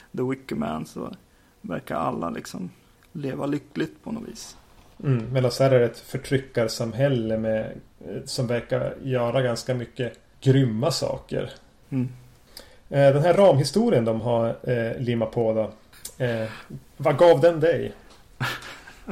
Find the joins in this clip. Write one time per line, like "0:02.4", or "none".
none